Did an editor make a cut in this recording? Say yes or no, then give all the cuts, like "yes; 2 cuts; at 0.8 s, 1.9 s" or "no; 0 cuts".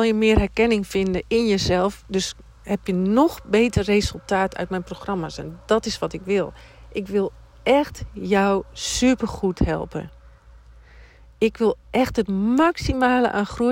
no; 0 cuts